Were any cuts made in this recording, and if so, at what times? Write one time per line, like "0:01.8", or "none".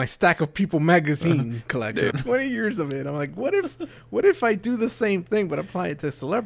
0:02.1